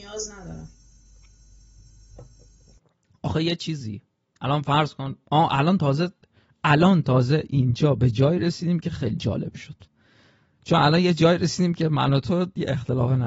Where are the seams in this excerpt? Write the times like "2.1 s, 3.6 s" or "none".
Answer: none